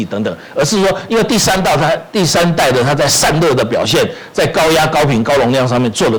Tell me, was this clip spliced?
no; 0 cuts

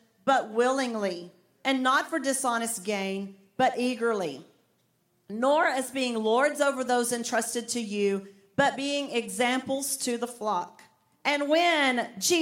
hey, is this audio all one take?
yes; 0 cuts

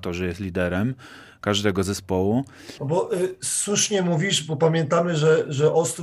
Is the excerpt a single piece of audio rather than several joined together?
no; 1 cut; at 2.8 s

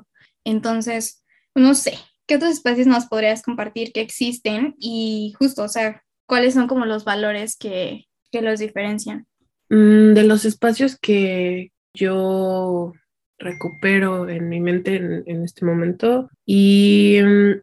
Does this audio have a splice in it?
yes; 1 cut; at 16.3 s

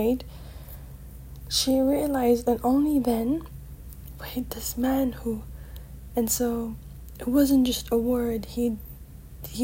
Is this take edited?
yes; 1 cut; at 6.1 s

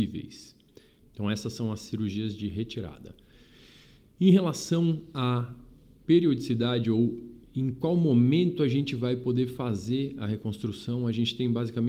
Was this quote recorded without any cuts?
no; 1 cut; at 1.0 s

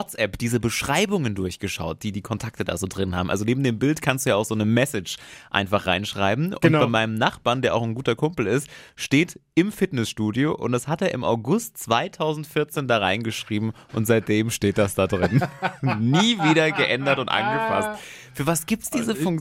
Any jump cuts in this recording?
no; 0 cuts

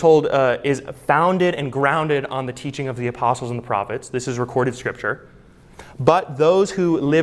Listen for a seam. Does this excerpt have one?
no; 0 cuts

